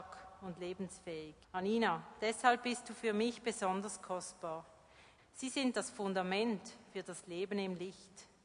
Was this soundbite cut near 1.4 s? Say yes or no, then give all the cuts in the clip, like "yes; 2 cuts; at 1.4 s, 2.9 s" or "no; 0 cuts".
yes; 2 cuts; at 1.4 s, 5.2 s